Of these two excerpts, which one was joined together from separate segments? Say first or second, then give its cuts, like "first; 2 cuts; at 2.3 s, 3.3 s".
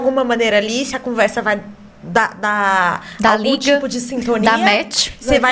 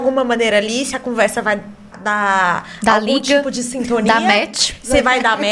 second; 1 cut; at 1.9 s